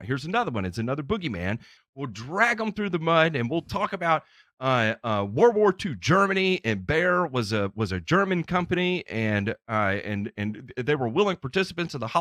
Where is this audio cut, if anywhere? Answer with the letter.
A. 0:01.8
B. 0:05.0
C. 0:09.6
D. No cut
A